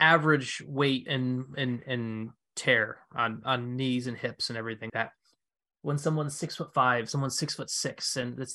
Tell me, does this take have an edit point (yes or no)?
yes